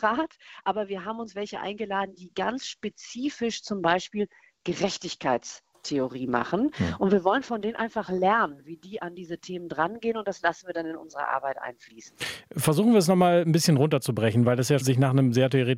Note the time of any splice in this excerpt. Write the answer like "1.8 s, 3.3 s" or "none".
14.8 s